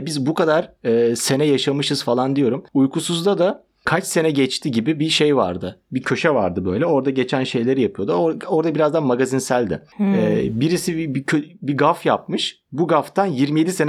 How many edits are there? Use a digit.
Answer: 0